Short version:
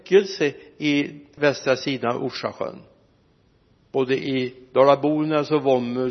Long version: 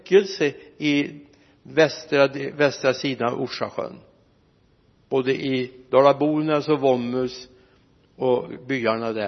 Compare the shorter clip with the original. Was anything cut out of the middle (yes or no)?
yes